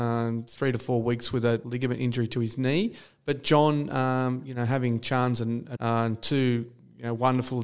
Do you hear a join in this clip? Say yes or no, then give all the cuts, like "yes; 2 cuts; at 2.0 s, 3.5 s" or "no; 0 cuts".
yes; 2 cuts; at 1.6 s, 5.7 s